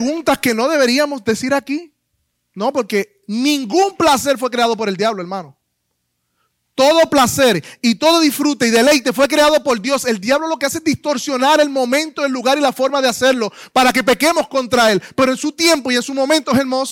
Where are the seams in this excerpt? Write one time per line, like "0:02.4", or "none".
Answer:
none